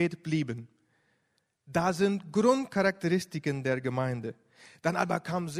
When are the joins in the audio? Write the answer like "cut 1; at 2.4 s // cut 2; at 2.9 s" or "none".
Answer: none